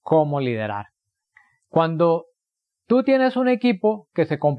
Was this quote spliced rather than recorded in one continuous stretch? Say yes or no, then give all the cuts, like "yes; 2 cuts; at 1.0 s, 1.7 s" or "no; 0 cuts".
no; 0 cuts